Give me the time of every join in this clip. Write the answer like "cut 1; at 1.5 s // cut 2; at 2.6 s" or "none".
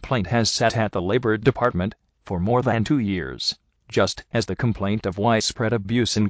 none